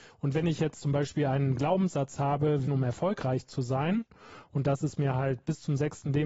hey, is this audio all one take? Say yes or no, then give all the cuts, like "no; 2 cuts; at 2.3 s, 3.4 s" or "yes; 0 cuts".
no; 1 cut; at 2.6 s